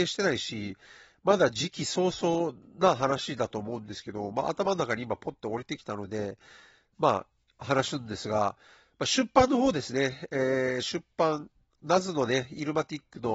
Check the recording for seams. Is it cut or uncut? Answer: uncut